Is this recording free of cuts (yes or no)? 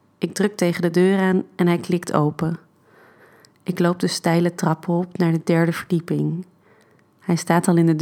yes